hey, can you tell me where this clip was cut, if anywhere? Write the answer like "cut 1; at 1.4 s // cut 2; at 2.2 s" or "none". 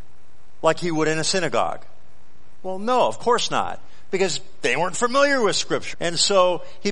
cut 1; at 5.9 s